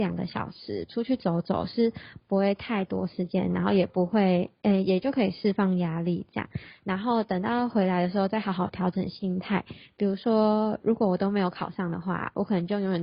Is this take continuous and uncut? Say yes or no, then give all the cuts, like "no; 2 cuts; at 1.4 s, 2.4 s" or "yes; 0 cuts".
yes; 0 cuts